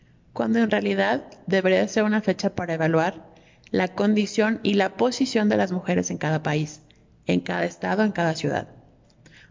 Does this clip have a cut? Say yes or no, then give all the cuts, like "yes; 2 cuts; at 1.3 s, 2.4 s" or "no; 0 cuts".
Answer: no; 0 cuts